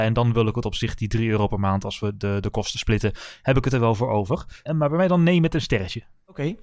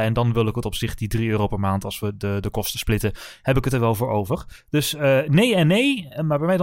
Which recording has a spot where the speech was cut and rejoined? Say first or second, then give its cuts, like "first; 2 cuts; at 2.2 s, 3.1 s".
first; 1 cut; at 4.7 s